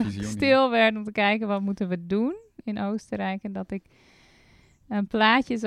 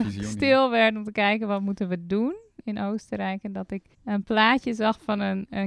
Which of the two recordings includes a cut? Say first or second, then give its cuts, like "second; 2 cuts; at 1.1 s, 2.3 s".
second; 1 cut; at 3.9 s